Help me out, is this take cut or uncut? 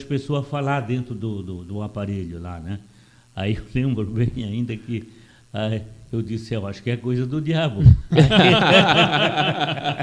uncut